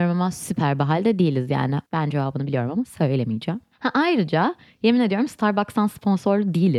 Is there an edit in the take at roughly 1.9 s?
yes; 1 cut; at 1.9 s

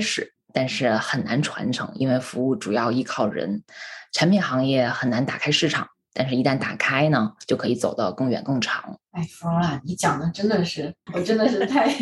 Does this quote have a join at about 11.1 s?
yes; 2 cuts; at 9.1 s, 11.1 s

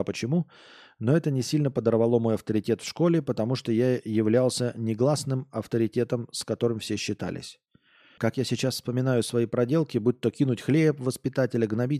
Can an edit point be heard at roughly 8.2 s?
yes; 1 cut; at 8.2 s

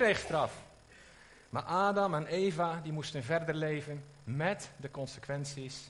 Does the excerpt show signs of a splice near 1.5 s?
no; 0 cuts

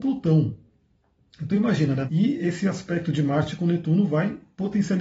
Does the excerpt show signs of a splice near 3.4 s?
no; 1 cut; at 2.1 s

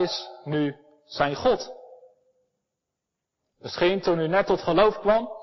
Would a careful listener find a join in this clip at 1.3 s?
no; 1 cut; at 3.5 s

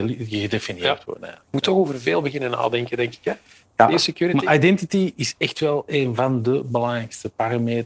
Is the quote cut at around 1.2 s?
no; 0 cuts

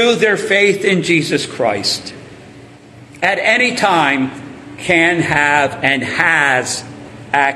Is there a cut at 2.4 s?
no; 0 cuts

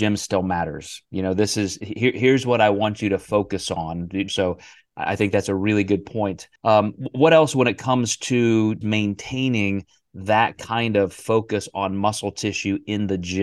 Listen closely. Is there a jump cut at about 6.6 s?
yes; 3 cuts; at 4.3 s, 6.6 s, 8.8 s

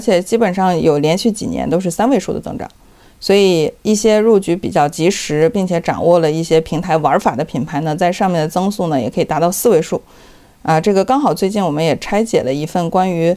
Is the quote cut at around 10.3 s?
no; 0 cuts

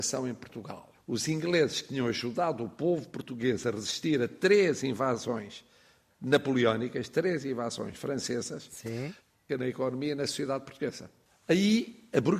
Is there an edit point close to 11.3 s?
no; 2 cuts; at 0.9 s, 9.5 s

